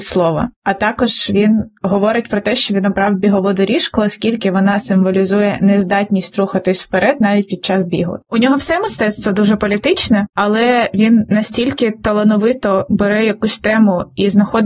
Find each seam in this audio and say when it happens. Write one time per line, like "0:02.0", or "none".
0:08.2